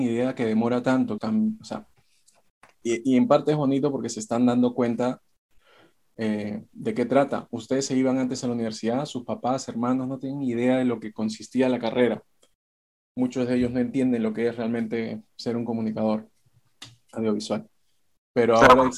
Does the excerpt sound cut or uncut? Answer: cut